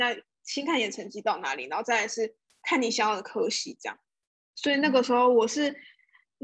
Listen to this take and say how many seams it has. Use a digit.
0